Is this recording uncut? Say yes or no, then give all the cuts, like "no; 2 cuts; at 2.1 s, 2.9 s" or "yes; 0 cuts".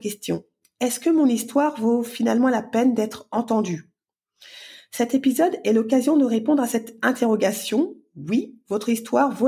yes; 0 cuts